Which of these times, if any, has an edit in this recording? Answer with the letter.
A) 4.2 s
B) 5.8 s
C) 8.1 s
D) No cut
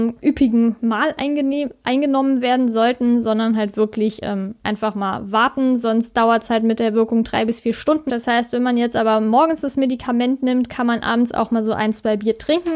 C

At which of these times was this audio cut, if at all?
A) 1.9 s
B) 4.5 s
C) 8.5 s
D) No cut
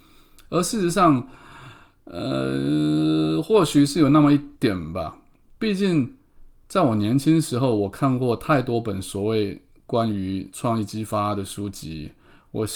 B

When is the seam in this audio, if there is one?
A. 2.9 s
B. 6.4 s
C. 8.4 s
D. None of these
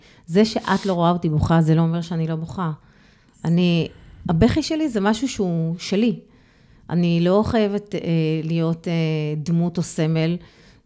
D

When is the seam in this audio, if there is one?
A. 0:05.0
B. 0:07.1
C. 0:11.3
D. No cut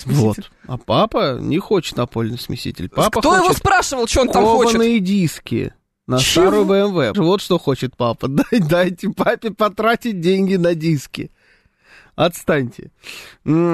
B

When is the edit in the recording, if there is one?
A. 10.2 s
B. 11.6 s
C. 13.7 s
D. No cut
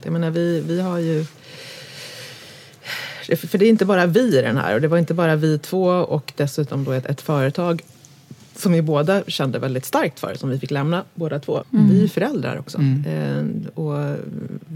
B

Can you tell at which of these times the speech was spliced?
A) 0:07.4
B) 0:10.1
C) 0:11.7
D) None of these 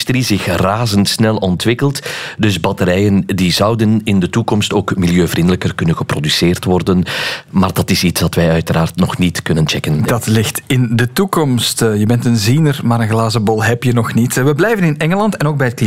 D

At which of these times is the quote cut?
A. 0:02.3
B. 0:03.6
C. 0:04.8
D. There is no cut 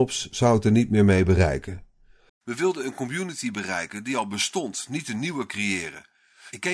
A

